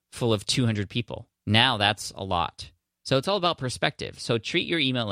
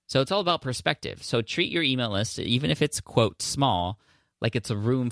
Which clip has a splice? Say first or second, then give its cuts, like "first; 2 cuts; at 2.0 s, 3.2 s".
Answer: first; 1 cut; at 1.3 s